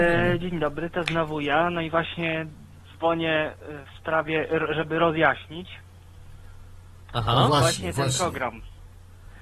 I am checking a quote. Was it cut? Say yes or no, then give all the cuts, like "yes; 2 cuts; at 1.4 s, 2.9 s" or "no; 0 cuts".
no; 0 cuts